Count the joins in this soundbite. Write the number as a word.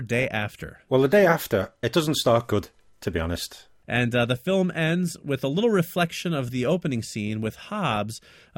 two